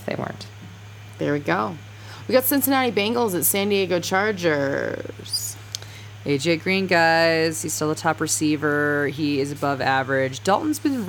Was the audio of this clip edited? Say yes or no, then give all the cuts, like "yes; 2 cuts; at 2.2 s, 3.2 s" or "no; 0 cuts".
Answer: no; 0 cuts